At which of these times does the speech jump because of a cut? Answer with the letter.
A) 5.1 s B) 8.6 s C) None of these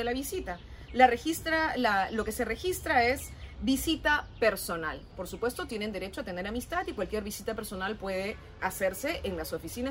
B